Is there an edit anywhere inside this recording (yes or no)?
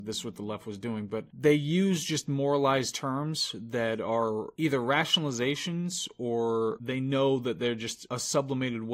no